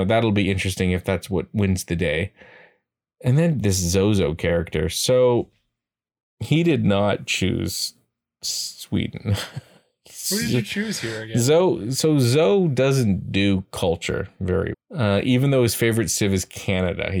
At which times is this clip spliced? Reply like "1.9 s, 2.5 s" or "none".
14.7 s